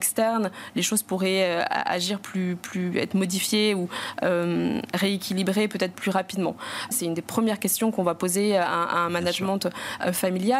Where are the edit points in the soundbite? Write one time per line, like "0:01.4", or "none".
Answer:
0:06.9